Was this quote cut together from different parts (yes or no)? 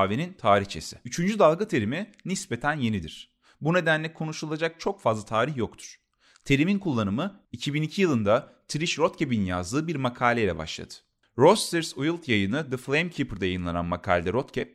no